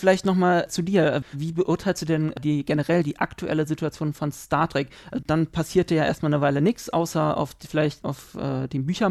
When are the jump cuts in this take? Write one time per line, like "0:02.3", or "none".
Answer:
0:01.2
0:05.2
0:08.0